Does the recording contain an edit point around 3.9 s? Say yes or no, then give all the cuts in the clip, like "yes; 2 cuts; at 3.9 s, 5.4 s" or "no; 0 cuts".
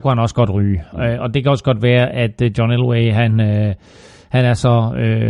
no; 0 cuts